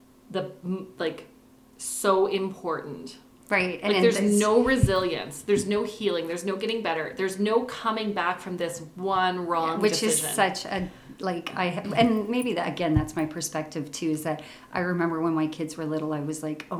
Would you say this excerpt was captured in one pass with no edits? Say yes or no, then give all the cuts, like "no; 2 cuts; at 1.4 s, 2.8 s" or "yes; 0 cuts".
yes; 0 cuts